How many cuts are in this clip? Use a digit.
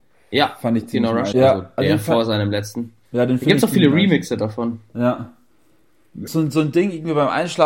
2